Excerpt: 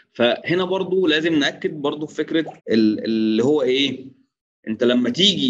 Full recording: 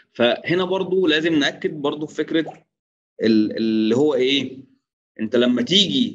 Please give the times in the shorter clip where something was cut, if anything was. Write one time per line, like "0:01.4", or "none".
0:02.6